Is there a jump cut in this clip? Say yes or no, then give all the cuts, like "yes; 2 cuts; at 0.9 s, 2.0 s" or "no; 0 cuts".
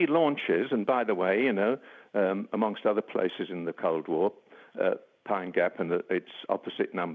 no; 0 cuts